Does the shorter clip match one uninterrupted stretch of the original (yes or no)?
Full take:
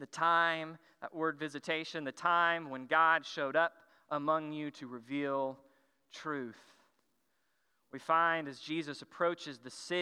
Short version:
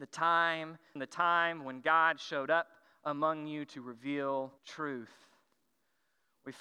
no